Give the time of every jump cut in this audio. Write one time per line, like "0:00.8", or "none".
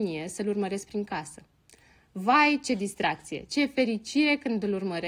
0:03.5